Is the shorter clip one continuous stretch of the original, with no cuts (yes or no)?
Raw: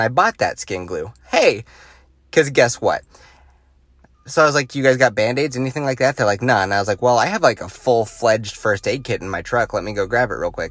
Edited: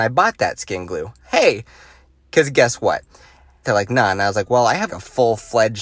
no